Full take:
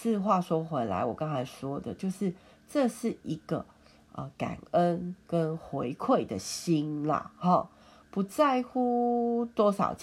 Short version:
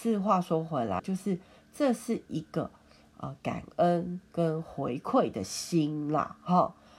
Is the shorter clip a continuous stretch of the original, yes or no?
no